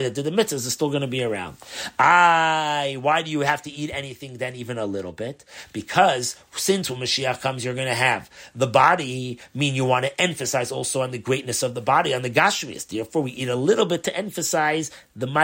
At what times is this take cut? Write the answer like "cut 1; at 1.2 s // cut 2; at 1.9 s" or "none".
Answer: none